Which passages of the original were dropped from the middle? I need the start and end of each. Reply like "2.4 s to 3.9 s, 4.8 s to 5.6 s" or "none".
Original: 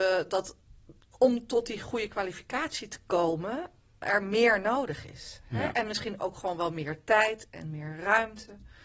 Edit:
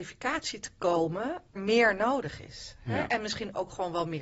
3.8 s to 4.2 s